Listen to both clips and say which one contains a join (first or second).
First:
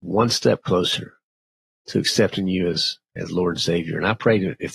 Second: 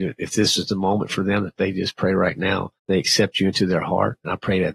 second